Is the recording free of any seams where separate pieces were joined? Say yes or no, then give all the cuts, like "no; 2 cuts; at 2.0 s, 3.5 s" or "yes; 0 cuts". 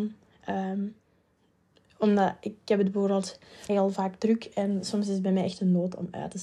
no; 1 cut; at 3.7 s